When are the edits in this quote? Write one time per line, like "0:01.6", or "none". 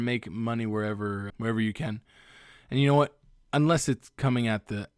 0:01.3